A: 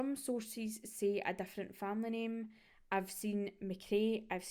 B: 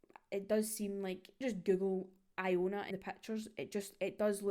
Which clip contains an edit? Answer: B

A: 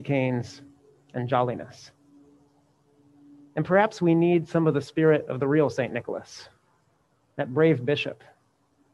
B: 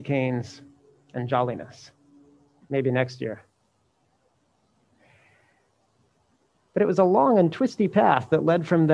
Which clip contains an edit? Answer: B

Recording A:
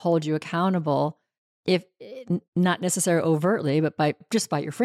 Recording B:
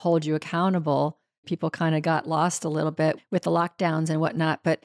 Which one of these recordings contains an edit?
B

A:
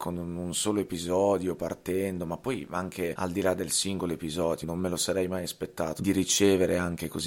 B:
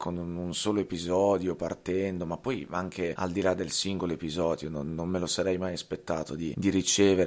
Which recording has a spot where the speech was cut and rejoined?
A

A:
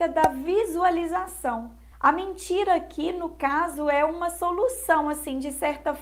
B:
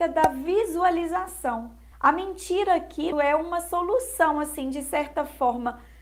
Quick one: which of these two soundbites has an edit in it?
B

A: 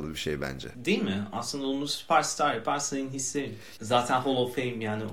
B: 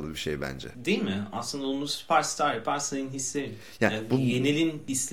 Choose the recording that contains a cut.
A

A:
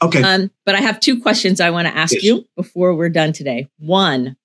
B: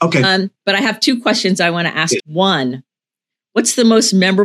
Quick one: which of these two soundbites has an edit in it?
B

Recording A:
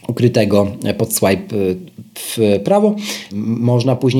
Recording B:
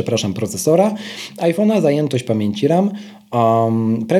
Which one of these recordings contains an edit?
A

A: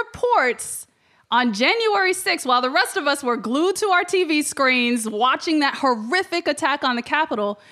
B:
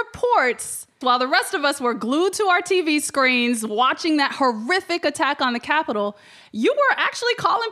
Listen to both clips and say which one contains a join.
B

